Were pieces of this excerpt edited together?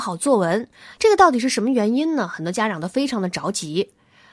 yes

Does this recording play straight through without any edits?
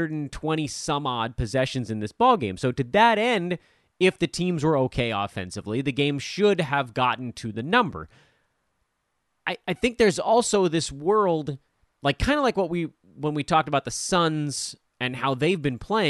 yes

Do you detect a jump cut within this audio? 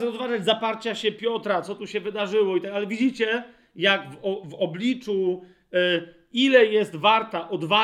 yes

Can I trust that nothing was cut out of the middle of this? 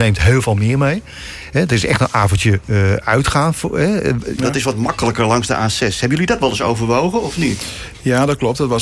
no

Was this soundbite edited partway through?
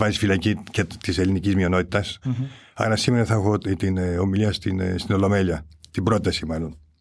yes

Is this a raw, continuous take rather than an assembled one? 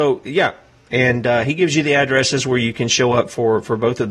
yes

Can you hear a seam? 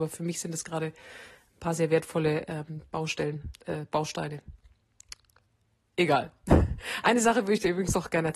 no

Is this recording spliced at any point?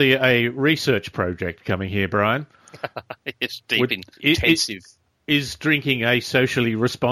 yes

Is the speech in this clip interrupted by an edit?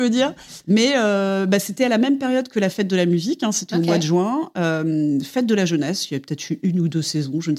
no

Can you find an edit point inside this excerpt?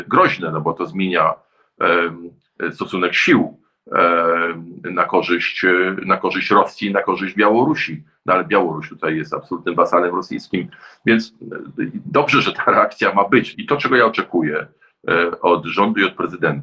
yes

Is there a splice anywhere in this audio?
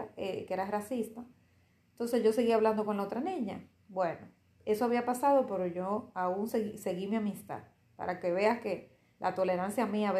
no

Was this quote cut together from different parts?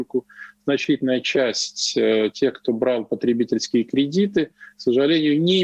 no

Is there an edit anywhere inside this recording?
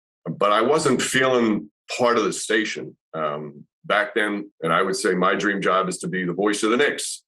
yes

